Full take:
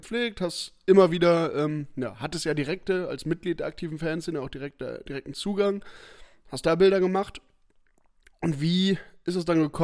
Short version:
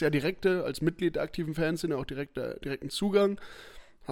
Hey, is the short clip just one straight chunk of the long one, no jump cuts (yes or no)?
yes